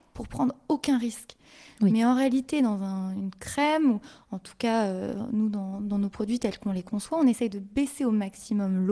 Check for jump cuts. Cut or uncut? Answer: uncut